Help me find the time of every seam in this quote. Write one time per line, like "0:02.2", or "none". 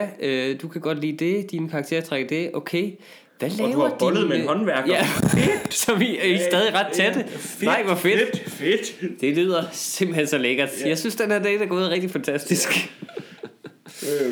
none